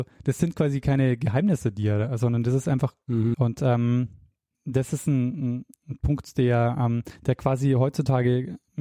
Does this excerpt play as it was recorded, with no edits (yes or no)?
no